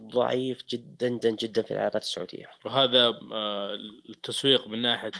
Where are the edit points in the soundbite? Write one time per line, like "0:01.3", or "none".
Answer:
0:01.2